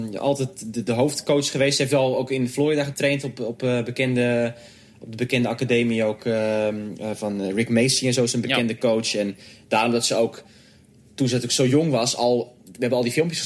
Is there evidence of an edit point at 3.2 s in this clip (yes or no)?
no